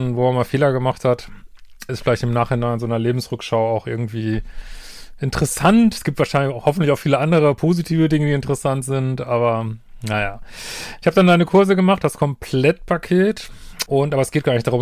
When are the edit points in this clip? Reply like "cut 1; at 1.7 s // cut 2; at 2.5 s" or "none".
cut 1; at 1.9 s // cut 2; at 13.9 s